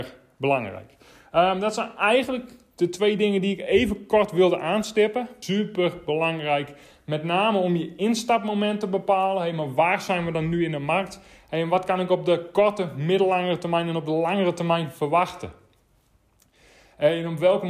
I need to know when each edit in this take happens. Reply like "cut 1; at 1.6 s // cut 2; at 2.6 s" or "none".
cut 1; at 5.4 s

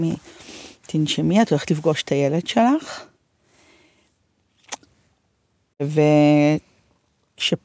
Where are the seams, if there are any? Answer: cut 1; at 5.7 s

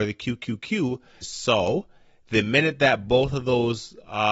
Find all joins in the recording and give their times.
cut 1; at 1.2 s

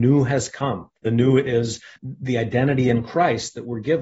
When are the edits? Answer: none

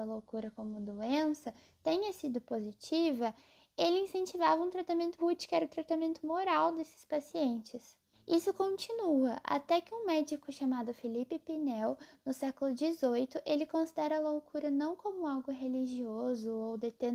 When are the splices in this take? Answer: cut 1; at 5.2 s // cut 2; at 8.1 s

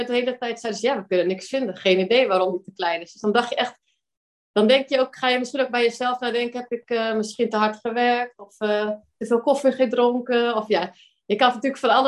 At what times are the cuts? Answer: none

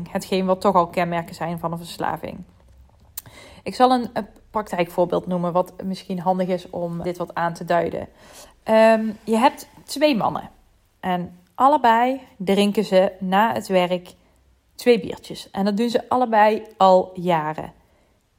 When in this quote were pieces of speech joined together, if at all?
cut 1; at 7.0 s

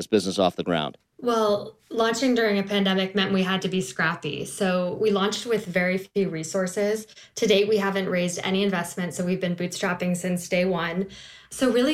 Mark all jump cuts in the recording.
none

